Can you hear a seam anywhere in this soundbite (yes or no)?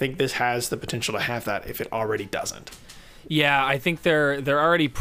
no